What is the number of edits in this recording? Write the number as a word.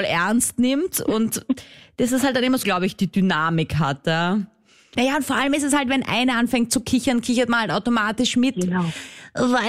two